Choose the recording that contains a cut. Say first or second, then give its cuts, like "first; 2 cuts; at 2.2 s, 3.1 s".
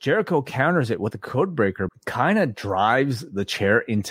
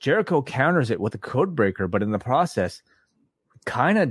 first; 1 cut; at 1.9 s